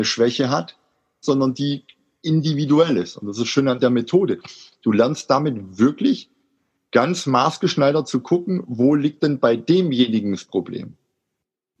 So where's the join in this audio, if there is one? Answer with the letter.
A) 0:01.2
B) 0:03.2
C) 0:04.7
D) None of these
A